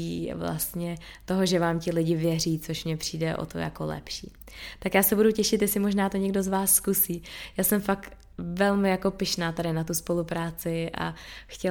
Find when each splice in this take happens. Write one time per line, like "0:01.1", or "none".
none